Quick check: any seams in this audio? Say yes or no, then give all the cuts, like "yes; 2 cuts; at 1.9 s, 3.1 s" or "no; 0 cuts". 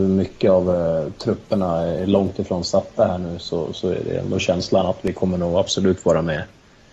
no; 0 cuts